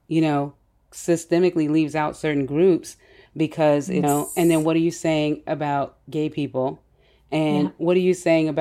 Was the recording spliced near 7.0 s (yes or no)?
no